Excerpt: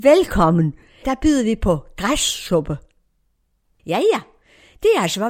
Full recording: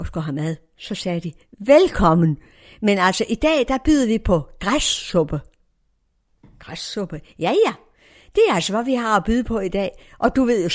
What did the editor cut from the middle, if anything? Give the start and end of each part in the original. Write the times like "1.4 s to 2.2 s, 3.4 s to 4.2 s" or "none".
2.7 s to 3.7 s, 6.4 s to 7.3 s